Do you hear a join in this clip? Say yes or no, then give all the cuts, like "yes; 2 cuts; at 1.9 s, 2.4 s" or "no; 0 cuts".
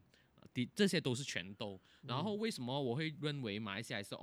yes; 1 cut; at 2.0 s